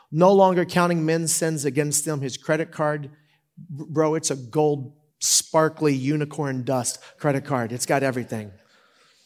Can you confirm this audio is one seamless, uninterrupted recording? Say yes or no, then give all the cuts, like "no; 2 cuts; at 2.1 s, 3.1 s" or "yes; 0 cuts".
no; 1 cut; at 5.1 s